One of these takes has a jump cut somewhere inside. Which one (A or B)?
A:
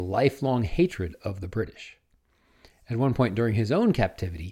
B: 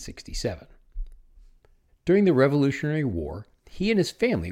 B